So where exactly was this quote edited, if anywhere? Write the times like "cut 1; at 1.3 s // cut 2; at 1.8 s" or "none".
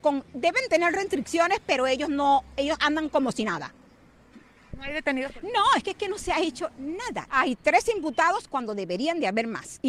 cut 1; at 5.4 s // cut 2; at 7.3 s